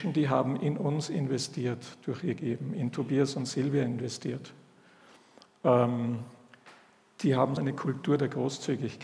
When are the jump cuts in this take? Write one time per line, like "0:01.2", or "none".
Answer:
0:07.6